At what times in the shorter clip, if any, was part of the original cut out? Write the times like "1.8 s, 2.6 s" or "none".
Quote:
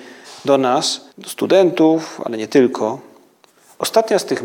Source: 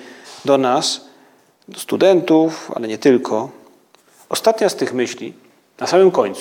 1.1 s

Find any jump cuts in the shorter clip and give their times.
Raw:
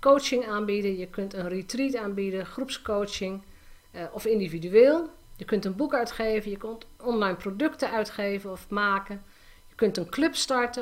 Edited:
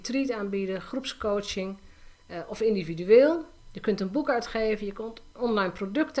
none

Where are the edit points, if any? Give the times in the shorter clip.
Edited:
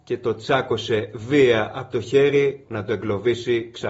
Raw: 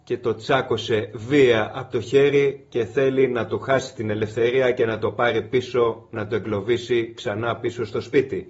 2.7 s

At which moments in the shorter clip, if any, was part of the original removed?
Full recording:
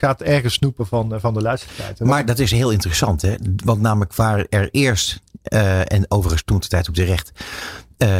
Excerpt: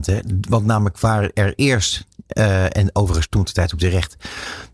none

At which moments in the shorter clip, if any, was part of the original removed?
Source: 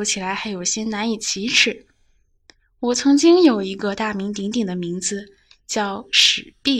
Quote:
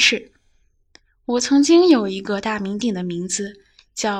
2.8 s

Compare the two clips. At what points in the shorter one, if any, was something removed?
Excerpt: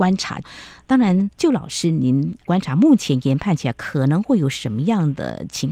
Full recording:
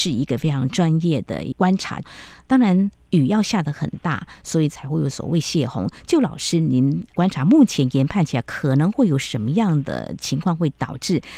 1.4 s

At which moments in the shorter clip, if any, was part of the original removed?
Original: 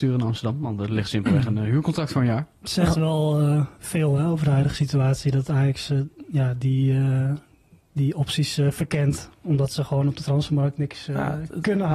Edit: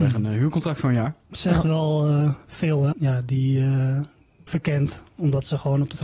2.9 s, 4.5 s

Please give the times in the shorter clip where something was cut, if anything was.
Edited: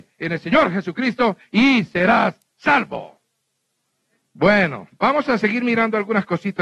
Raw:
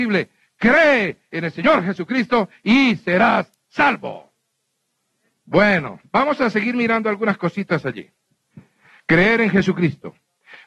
none

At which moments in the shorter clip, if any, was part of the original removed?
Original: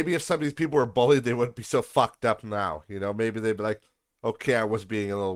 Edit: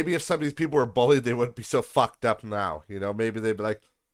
none

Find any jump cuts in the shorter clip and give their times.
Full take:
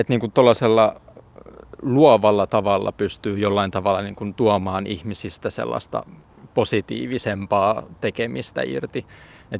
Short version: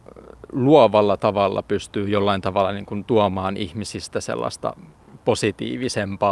none

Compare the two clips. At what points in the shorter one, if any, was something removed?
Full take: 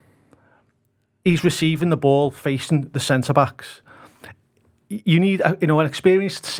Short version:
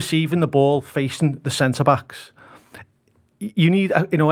none

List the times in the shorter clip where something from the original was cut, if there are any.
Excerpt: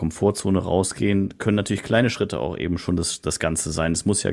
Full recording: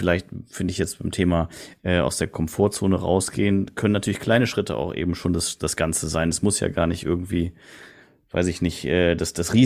none

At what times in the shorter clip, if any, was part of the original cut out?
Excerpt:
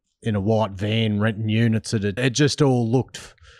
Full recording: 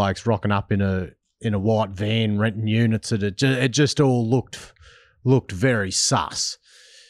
2.2 s

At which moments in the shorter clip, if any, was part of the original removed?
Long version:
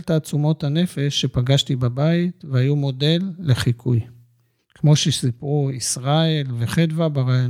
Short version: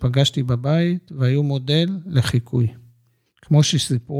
none

